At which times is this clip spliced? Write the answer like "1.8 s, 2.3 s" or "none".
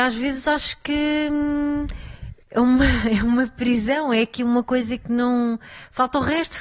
2.4 s